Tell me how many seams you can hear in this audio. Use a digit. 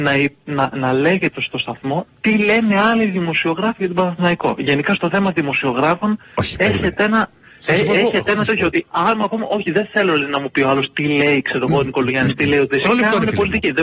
1